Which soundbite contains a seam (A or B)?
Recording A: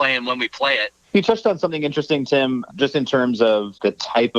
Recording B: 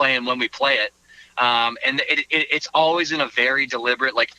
A